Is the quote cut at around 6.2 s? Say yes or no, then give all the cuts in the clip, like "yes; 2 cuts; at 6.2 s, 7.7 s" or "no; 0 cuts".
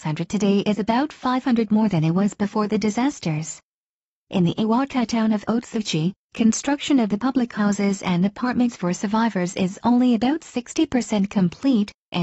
yes; 1 cut; at 6.2 s